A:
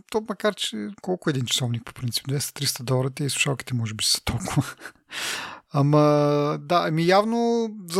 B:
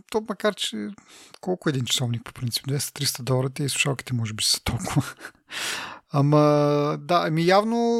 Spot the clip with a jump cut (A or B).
A